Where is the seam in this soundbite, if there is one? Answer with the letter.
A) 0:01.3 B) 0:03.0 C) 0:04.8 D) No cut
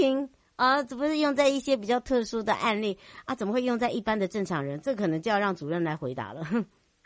D